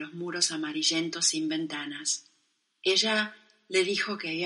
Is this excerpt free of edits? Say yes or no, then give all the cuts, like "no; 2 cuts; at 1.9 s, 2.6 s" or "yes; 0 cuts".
no; 1 cut; at 2.7 s